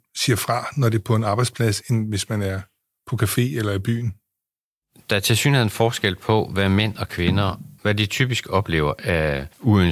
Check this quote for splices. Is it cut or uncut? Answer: uncut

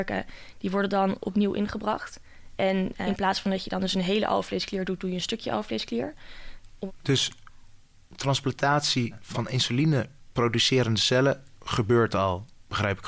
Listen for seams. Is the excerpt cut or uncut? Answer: uncut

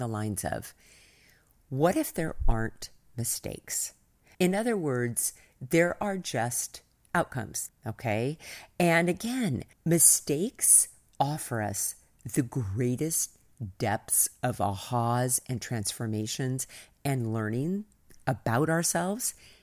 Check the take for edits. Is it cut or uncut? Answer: cut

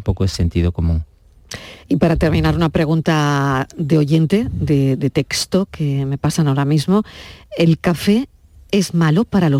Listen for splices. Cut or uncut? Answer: uncut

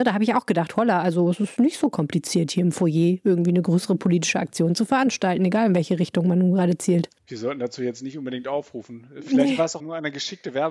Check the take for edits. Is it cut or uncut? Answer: cut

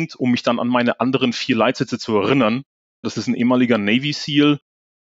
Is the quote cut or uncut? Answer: cut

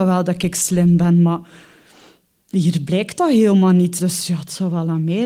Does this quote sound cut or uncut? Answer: cut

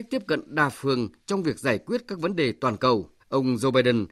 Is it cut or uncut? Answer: cut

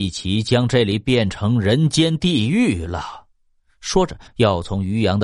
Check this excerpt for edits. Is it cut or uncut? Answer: cut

